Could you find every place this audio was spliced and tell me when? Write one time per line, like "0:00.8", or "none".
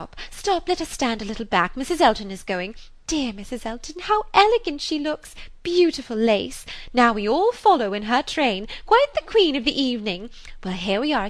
none